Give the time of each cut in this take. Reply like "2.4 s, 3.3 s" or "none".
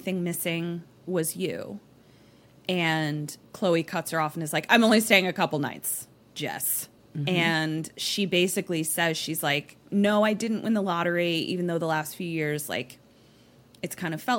7.0 s